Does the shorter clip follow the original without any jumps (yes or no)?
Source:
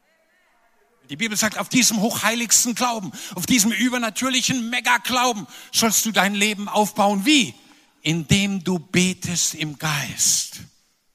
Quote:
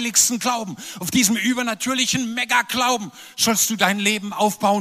yes